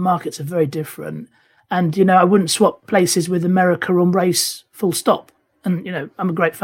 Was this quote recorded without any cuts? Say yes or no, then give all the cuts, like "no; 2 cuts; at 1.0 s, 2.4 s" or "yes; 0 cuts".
yes; 0 cuts